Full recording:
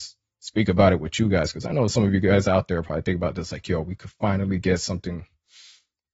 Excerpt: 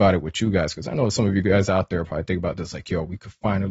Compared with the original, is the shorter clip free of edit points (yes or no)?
yes